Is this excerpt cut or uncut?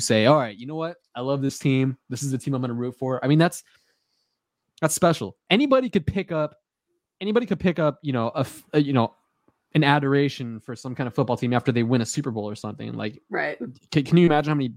uncut